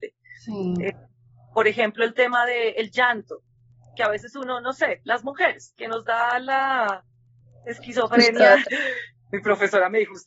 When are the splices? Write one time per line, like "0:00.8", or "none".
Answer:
0:08.6